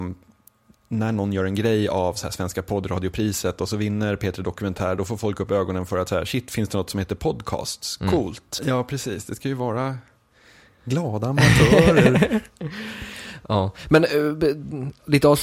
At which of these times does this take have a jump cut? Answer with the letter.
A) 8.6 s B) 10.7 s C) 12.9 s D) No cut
A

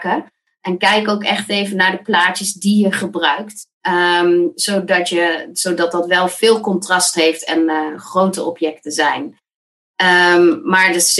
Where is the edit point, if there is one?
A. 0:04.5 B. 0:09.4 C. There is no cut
C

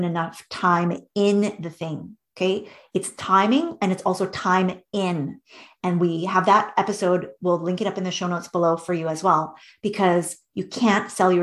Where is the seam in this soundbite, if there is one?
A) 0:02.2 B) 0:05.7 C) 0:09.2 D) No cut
D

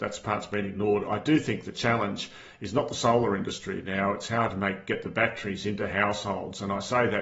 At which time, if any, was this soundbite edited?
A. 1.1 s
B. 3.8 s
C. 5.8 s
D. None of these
D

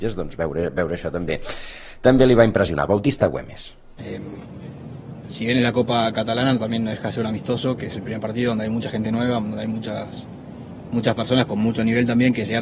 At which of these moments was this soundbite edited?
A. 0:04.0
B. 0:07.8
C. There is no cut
A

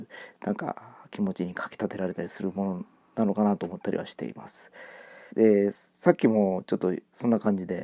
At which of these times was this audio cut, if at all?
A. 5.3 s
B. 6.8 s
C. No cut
A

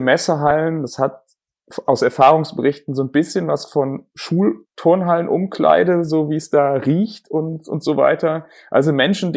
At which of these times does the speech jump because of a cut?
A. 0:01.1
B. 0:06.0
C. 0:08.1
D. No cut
D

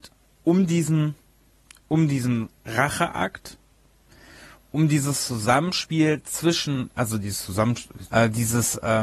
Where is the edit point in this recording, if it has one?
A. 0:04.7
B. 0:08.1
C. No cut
B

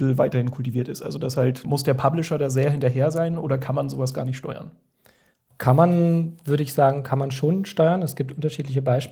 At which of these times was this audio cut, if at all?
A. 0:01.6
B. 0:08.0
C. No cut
A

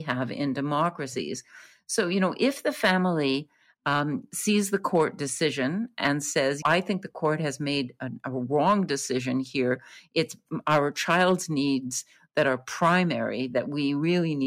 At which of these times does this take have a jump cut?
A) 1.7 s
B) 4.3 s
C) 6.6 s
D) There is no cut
C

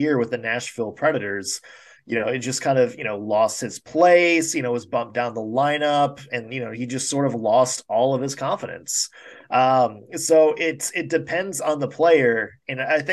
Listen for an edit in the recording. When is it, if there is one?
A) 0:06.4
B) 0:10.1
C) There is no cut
A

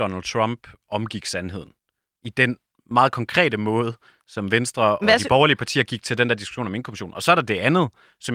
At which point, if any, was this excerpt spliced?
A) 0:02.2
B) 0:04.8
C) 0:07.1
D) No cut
D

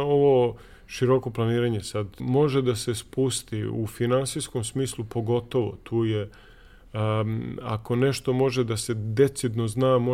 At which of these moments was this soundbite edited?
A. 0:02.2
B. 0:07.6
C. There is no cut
A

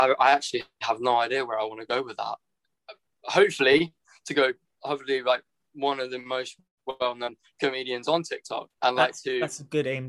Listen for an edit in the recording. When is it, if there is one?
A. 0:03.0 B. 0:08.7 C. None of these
B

